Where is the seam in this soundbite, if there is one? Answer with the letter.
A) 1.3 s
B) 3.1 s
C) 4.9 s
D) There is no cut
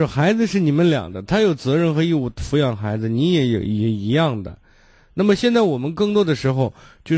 D